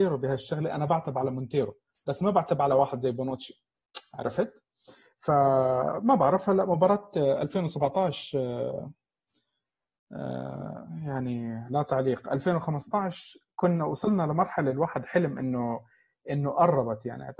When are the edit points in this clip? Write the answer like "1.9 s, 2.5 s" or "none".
none